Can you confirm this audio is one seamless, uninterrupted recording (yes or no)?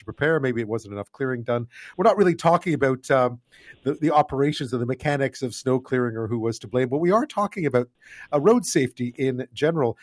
yes